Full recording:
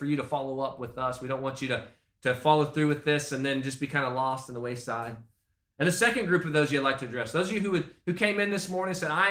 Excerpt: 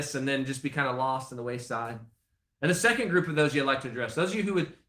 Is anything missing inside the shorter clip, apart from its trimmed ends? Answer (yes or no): no